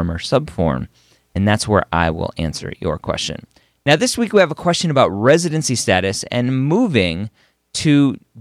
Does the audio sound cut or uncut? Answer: uncut